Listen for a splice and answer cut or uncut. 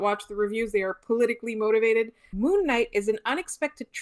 cut